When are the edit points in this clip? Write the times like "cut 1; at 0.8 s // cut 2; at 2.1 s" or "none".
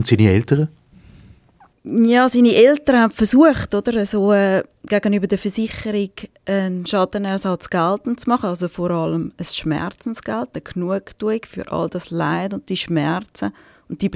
none